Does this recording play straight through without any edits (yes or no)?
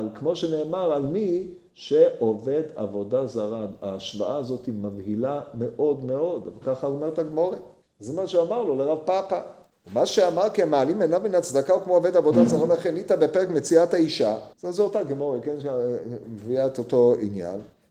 no